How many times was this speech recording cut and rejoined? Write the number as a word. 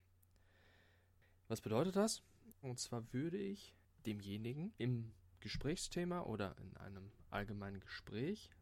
two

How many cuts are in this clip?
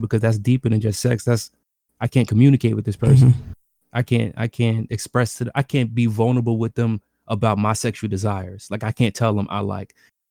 zero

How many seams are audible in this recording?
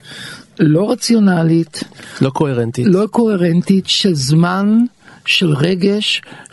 zero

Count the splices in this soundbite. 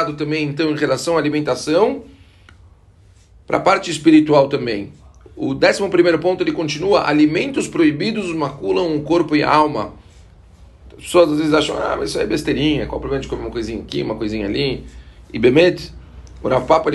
zero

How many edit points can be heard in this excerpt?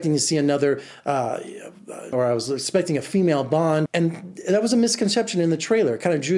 two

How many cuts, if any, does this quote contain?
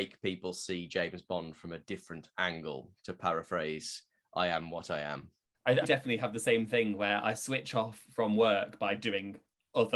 one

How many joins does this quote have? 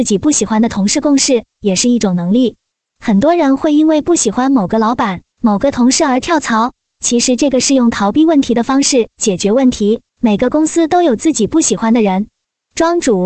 two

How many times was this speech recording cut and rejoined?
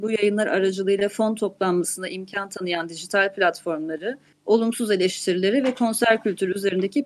one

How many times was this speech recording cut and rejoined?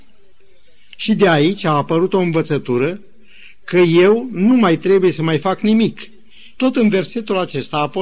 two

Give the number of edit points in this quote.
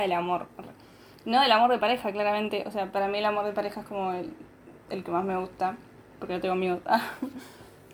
zero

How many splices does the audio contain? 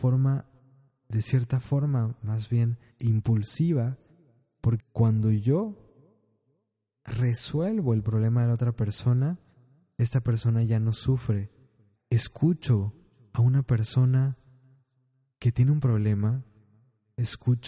two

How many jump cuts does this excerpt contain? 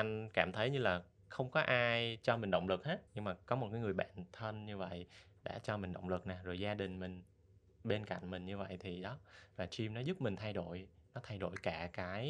one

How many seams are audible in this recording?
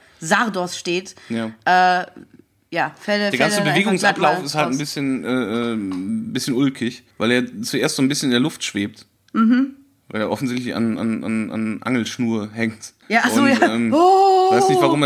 two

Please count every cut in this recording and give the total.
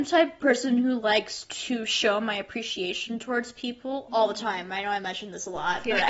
zero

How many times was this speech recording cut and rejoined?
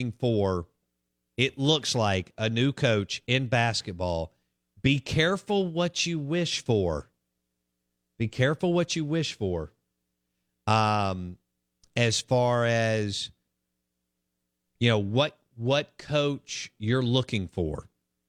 zero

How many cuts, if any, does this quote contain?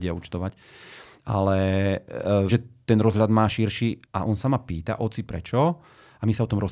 two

